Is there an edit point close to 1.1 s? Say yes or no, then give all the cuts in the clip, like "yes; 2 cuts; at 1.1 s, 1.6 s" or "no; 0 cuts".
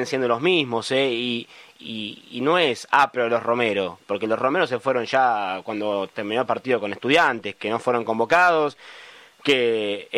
no; 0 cuts